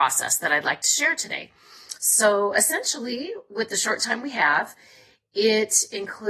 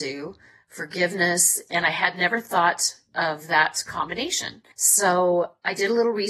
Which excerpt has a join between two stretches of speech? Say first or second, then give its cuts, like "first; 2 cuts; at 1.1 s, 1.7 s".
second; 2 cuts; at 1.7 s, 4.7 s